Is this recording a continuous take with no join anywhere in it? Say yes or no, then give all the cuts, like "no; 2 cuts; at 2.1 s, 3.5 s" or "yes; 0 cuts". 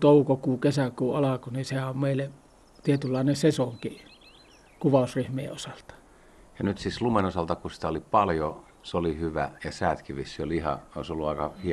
yes; 0 cuts